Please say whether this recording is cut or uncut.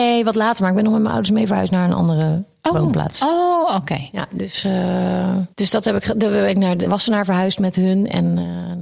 cut